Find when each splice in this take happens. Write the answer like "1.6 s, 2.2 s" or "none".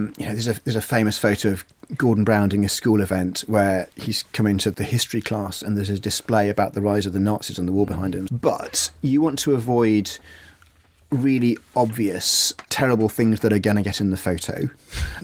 8.3 s